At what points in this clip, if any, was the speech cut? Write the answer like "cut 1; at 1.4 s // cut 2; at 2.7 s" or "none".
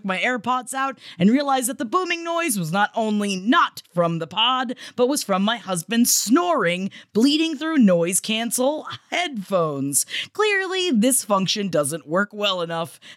none